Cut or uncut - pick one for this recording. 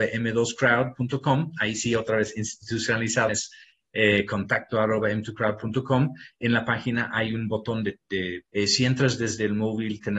cut